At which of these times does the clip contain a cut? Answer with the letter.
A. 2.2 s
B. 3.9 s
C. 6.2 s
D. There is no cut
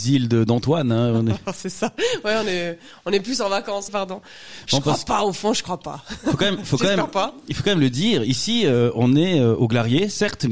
B